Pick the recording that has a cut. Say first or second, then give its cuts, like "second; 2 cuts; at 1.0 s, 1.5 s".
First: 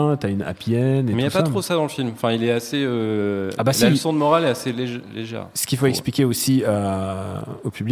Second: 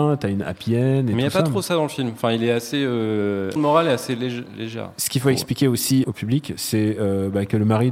second; 2 cuts; at 3.6 s, 6.0 s